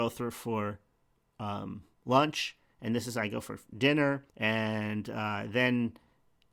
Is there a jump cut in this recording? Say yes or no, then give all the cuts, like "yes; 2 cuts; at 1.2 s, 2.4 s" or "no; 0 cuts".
yes; 2 cuts; at 1.9 s, 4.3 s